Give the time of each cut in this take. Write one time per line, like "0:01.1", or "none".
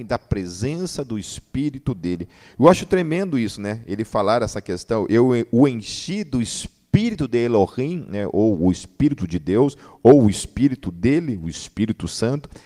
none